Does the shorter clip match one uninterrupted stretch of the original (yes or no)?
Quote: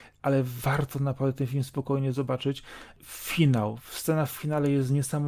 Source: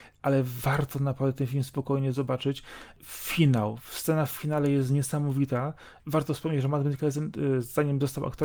yes